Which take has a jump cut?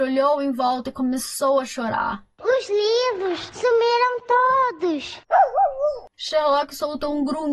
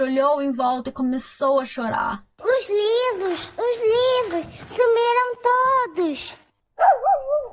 first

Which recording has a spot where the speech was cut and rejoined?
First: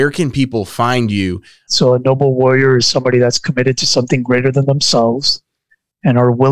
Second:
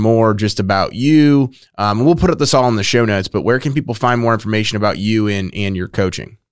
first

